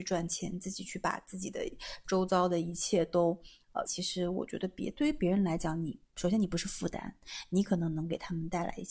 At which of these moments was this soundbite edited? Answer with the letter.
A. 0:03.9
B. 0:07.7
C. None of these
A